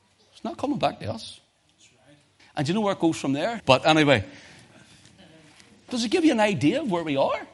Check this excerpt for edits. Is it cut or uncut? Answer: cut